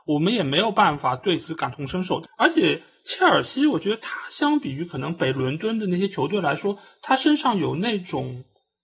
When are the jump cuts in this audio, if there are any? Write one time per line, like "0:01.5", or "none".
0:02.2